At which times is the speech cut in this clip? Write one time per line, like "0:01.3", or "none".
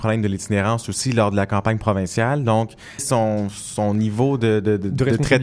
0:03.0